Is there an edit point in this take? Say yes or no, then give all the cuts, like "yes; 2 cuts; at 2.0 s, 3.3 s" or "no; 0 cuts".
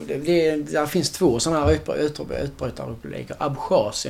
no; 0 cuts